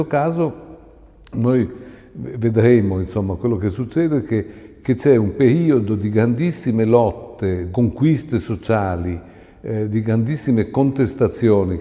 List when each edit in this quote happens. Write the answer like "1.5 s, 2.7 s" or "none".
7.7 s